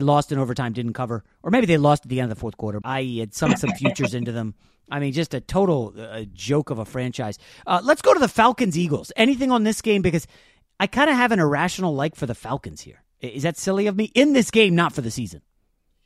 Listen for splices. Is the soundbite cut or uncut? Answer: cut